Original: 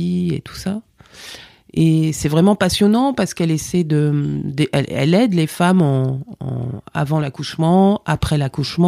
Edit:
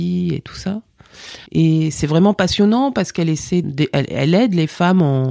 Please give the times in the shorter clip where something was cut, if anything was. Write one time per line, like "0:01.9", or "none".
0:01.5
0:03.6